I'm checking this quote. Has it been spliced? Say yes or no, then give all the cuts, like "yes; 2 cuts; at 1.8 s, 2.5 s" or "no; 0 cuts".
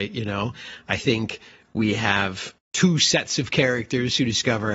yes; 1 cut; at 2.7 s